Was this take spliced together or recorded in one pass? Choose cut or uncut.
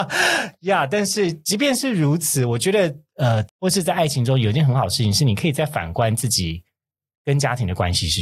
cut